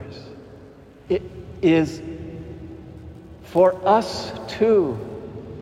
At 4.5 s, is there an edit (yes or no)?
no